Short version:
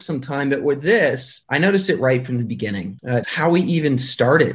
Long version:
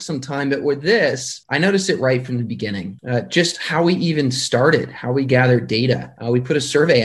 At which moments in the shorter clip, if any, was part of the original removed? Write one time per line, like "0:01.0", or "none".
0:03.2

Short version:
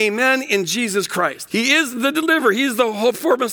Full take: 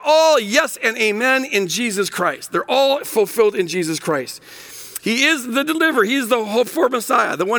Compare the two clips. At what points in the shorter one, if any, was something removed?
0:01.5

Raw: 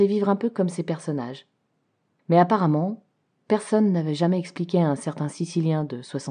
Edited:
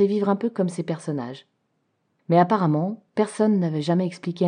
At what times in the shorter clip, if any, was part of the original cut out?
0:03.1

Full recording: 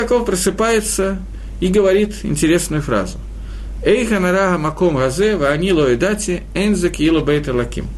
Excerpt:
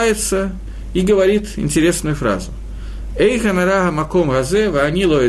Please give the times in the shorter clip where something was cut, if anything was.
none

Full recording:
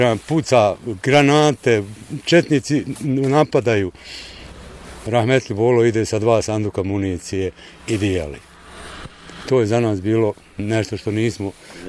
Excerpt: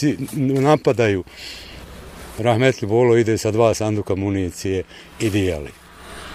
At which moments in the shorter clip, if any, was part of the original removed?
none

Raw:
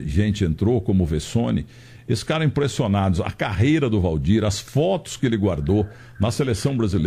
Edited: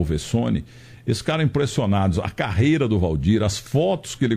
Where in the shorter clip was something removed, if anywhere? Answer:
none

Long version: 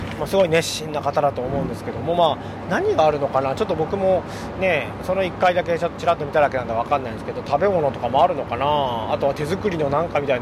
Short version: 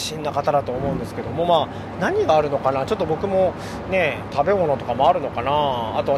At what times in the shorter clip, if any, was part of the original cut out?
0:04.3

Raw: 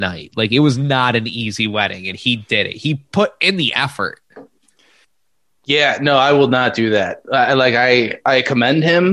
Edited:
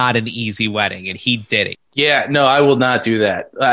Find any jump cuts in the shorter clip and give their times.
0:01.7

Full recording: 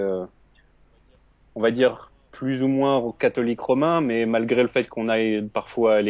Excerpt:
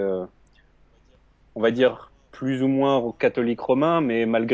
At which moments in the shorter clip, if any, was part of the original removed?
none

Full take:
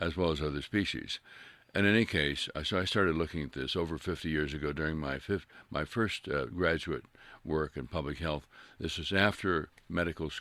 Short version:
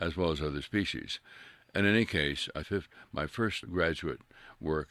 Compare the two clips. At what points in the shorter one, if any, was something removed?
0:02.6
0:03.6

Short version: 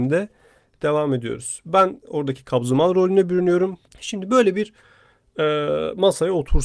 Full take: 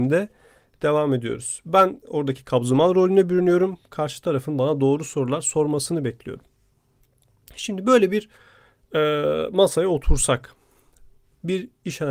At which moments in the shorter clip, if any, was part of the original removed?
0:03.9

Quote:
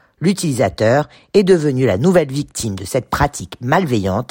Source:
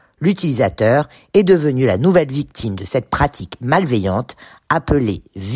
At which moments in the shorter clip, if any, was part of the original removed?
none

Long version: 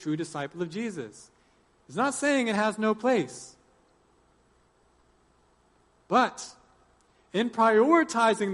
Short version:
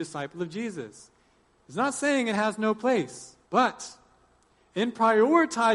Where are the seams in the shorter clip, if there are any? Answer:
0:03.4

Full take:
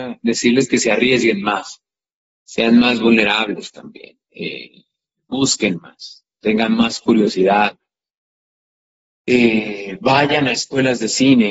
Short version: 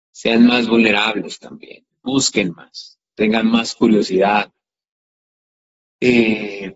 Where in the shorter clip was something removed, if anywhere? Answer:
0:01.9

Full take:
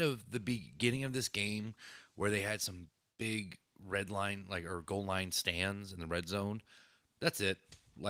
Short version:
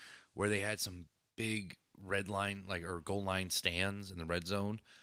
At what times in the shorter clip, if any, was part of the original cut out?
none

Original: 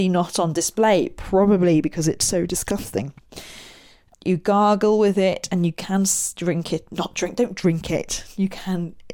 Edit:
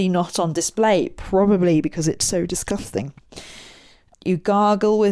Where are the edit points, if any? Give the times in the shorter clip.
none

